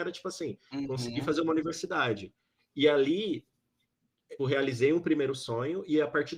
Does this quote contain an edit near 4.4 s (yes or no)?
yes